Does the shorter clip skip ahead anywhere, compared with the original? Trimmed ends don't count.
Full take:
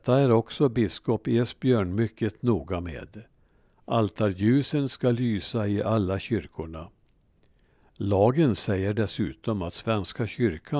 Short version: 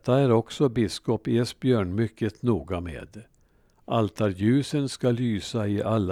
no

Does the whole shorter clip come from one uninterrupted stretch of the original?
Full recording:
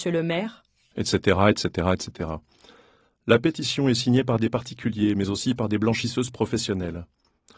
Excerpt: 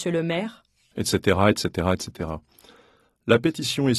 yes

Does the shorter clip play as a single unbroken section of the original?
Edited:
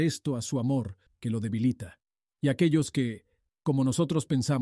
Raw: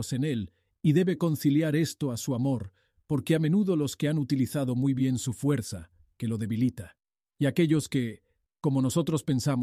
no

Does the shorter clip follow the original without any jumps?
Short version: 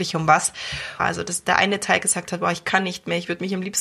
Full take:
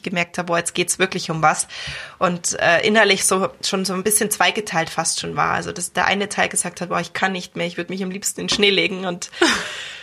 no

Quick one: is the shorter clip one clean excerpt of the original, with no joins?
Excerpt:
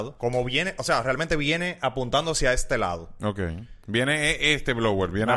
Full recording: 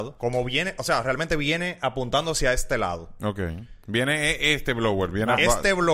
yes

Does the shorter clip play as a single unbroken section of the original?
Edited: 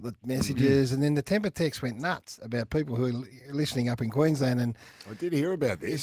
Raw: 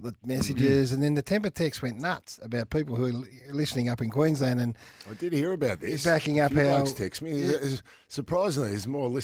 yes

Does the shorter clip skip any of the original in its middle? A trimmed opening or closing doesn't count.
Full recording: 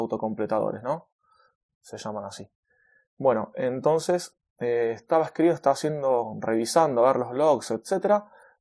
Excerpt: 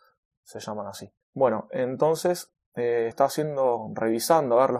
yes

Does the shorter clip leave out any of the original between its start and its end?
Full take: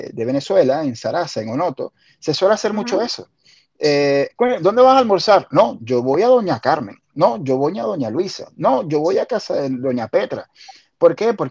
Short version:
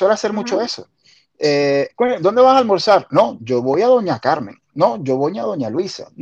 no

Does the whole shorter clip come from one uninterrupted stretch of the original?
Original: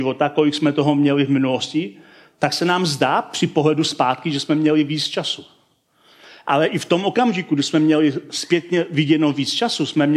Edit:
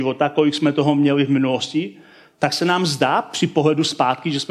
yes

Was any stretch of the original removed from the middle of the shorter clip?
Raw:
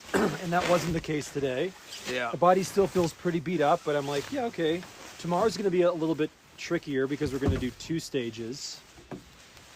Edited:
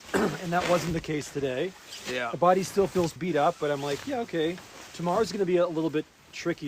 yes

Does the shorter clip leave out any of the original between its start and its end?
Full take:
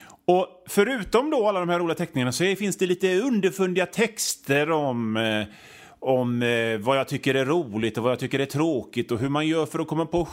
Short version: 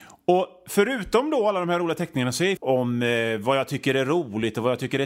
yes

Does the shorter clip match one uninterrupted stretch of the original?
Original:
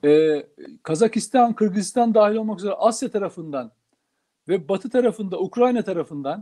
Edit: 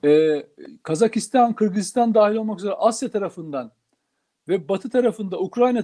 yes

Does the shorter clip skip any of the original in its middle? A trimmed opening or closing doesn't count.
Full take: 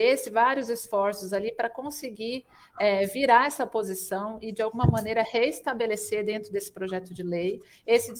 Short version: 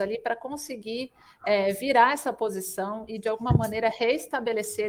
no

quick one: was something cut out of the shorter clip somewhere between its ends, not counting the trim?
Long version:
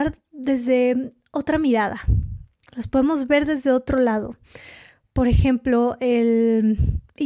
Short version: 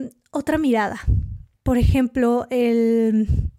yes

